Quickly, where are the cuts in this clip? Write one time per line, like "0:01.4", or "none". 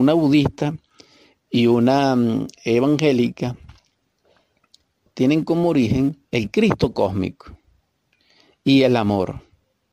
0:05.1
0:06.2